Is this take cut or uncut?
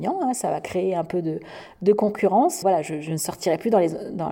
cut